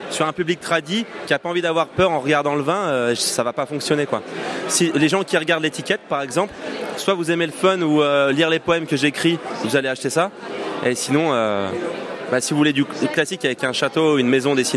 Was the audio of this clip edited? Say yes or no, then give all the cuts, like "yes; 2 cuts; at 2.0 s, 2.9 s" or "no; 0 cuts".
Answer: no; 0 cuts